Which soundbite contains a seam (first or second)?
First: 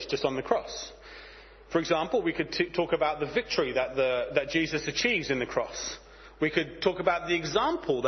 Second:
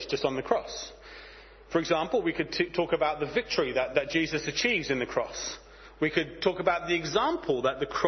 second